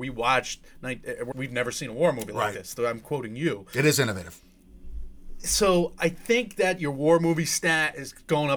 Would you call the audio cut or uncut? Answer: cut